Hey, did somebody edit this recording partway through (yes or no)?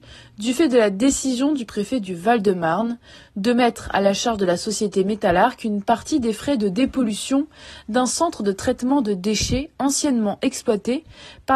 no